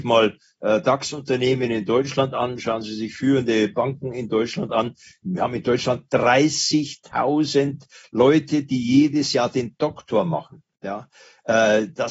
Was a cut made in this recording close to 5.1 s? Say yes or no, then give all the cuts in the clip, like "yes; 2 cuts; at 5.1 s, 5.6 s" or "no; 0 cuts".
yes; 1 cut; at 5.1 s